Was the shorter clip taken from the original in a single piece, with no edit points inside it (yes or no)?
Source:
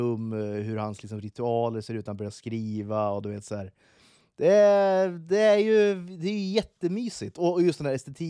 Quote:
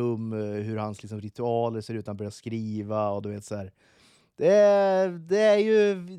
yes